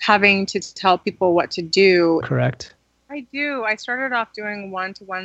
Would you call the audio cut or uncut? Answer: cut